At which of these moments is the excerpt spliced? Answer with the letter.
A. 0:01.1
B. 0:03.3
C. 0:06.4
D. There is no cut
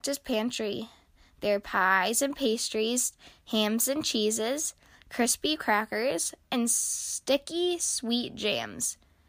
C